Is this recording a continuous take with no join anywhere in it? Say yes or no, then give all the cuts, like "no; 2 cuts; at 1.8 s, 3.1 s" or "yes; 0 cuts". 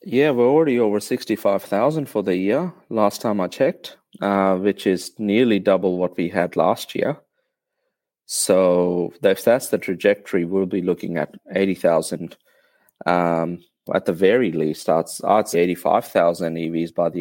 no; 2 cuts; at 13.9 s, 15.5 s